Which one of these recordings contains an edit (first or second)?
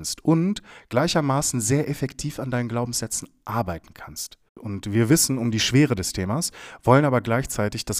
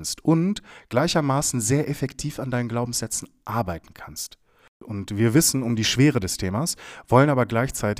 first